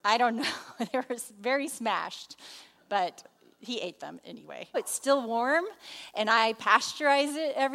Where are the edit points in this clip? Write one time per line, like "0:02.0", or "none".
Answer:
0:04.7

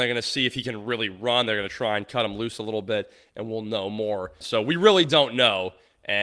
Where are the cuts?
0:04.4

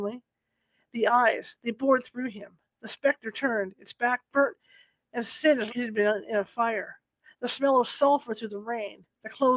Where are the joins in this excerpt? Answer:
0:05.7

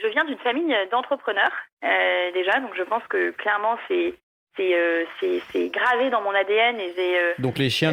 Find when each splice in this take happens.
none

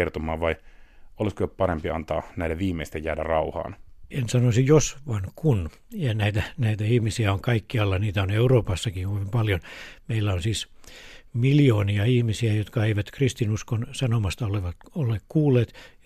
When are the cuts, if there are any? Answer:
none

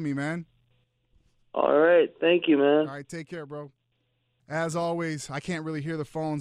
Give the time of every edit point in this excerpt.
0:04.4

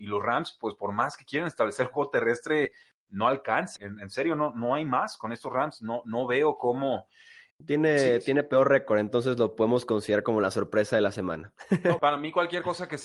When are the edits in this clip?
0:03.8
0:07.5
0:12.0

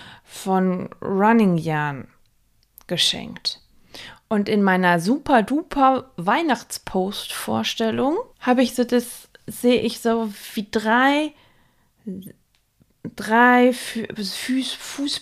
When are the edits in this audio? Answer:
0:04.2
0:08.3

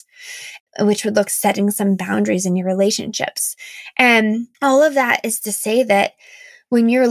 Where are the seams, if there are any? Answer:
0:01.3
0:04.5

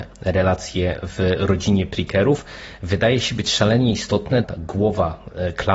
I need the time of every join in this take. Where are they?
0:04.4

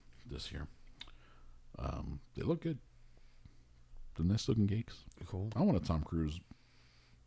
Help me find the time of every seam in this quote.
none

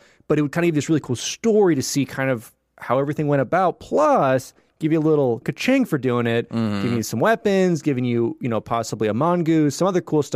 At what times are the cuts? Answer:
0:05.4

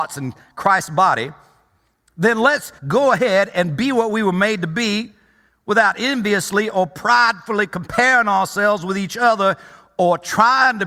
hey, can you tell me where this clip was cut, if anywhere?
0:02.8

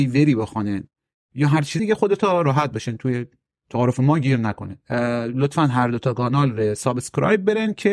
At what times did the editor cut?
0:01.8

